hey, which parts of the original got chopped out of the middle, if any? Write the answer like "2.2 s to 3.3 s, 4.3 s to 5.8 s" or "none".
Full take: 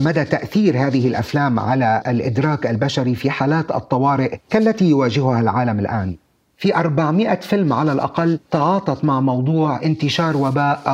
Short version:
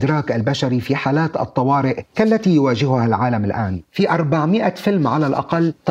6.2 s to 6.5 s